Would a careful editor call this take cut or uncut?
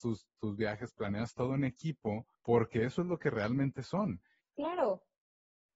cut